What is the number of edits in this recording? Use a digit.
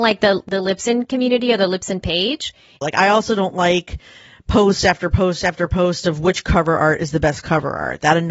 1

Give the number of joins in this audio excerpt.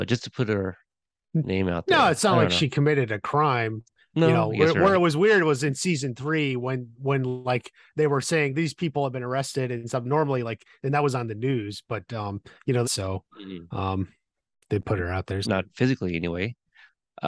2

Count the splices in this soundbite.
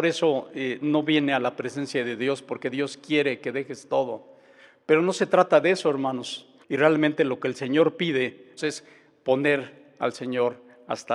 2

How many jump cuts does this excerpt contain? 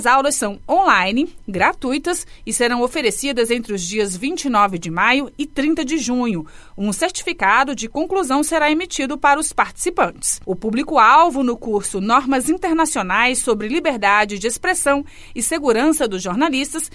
0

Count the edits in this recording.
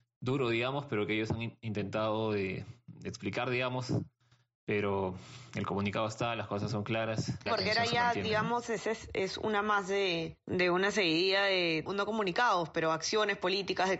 2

